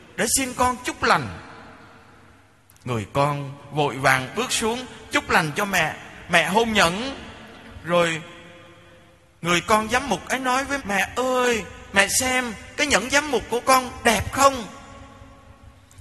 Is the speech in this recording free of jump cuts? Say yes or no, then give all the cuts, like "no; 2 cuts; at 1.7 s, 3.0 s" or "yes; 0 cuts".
no; 1 cut; at 10.8 s